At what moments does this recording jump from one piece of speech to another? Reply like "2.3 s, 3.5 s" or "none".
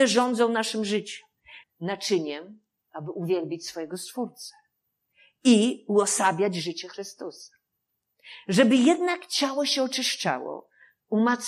1.6 s